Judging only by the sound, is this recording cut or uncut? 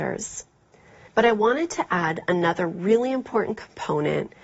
cut